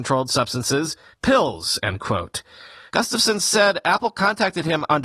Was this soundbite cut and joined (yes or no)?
yes